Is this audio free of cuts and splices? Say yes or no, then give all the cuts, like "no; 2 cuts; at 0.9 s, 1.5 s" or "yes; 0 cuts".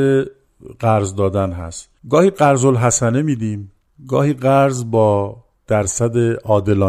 no; 1 cut; at 2.0 s